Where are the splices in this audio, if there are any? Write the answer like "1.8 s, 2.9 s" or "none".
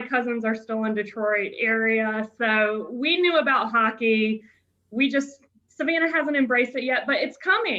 none